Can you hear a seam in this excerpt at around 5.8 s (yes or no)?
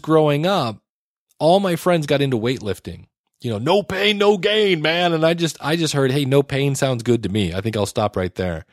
no